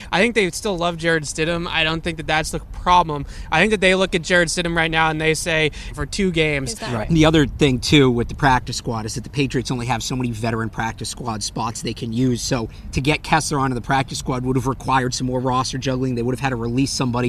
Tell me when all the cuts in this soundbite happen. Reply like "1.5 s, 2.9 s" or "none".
5.9 s, 7.0 s